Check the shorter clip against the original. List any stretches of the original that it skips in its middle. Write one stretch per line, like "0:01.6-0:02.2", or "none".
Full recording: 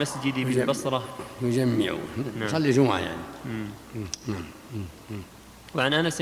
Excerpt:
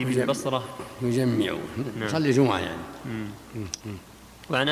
0:04.2-0:05.1